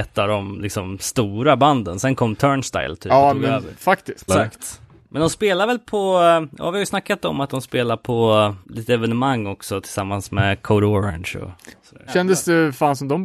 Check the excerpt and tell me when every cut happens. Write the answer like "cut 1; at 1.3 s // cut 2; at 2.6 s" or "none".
cut 1; at 4.3 s // cut 2; at 8.6 s // cut 3; at 12.1 s